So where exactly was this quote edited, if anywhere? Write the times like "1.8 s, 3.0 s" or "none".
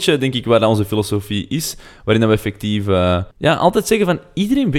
3.3 s